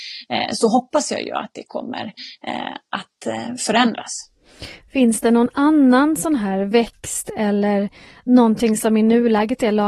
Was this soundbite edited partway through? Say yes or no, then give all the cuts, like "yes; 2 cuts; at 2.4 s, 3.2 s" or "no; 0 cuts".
no; 0 cuts